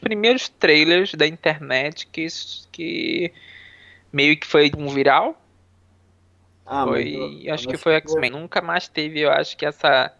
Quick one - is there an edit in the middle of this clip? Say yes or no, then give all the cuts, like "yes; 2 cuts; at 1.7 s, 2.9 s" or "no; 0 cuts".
yes; 2 cuts; at 4.7 s, 8.3 s